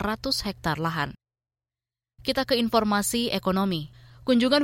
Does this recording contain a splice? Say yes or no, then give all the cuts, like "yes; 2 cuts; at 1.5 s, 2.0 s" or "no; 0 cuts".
no; 0 cuts